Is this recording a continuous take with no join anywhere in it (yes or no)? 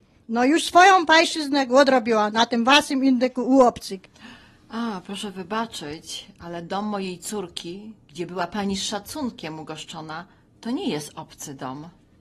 yes